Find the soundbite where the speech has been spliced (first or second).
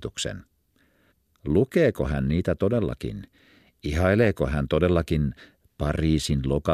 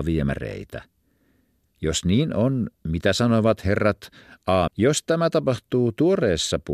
second